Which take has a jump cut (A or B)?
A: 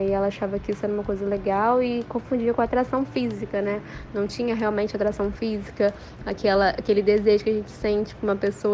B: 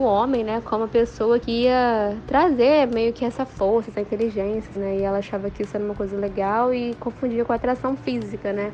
B